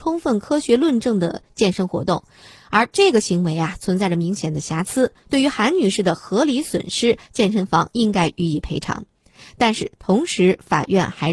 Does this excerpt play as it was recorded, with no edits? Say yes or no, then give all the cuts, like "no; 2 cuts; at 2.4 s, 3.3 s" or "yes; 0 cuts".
yes; 0 cuts